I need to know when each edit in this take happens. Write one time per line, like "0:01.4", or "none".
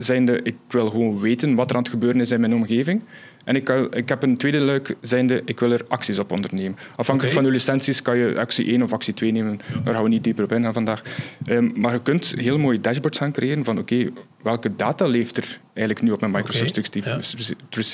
none